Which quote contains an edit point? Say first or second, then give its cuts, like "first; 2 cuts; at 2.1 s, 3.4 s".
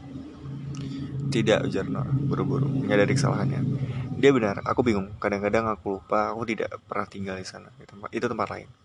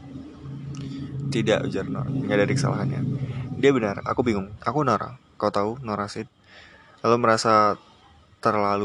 second; 2 cuts; at 2.1 s, 4.6 s